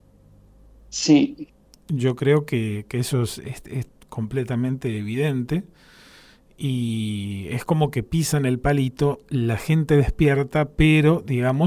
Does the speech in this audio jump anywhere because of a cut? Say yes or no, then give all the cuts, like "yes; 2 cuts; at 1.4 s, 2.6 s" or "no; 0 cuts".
no; 0 cuts